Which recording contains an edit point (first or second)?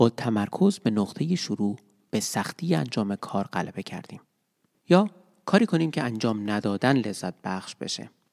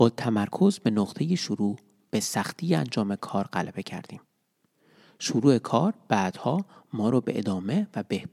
first